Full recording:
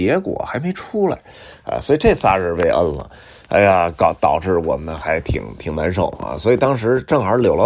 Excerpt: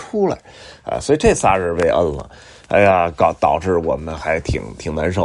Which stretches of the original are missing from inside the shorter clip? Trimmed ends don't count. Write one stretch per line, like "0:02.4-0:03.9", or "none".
none